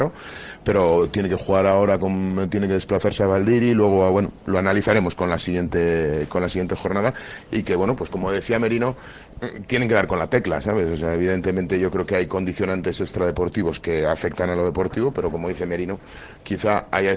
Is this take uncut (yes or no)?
yes